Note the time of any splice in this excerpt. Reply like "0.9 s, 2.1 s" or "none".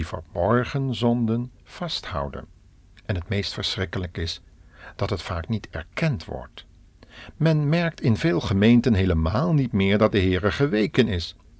none